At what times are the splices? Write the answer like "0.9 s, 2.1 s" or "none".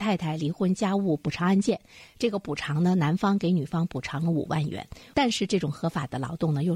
5.1 s